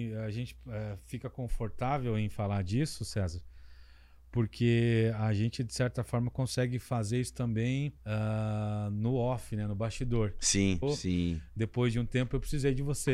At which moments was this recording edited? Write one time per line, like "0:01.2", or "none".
0:08.0
0:10.8